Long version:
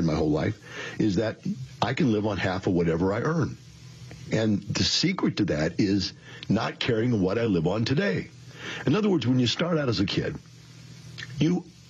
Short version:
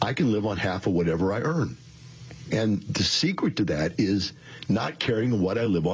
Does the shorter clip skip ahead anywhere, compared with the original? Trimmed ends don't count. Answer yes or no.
no